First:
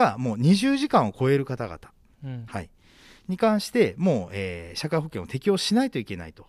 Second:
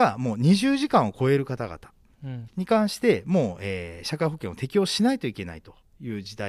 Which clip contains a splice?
second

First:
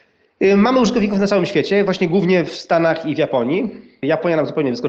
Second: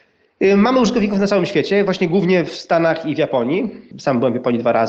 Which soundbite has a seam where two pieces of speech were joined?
second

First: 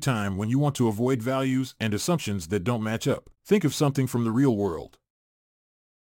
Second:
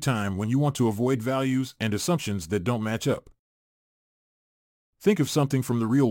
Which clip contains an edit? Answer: first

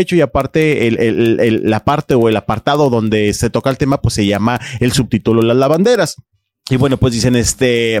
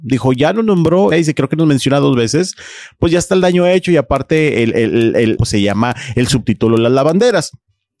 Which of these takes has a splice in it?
second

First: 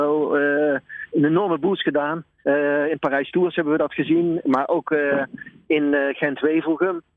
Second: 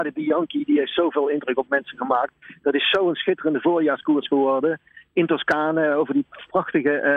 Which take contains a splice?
first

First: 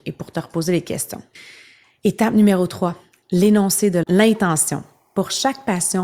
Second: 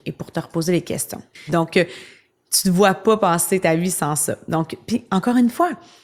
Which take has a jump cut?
second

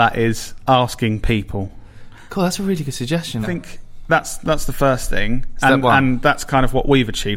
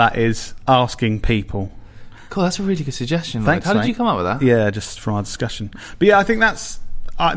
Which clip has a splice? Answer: first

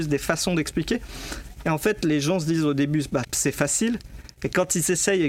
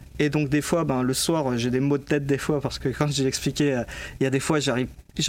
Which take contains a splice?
first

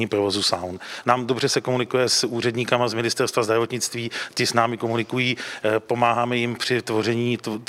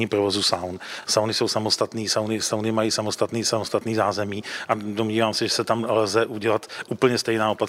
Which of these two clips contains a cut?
first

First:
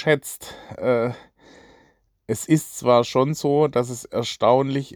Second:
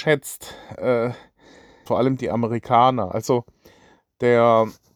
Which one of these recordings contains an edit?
second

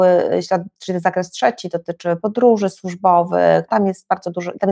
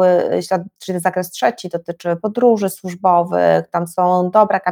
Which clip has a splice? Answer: first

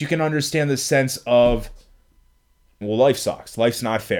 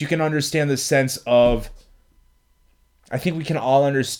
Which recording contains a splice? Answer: first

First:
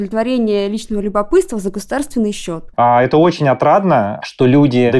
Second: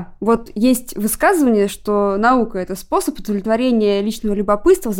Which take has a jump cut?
first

